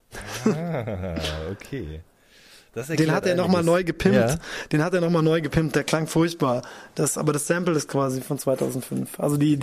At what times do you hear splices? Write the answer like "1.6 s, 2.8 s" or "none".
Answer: none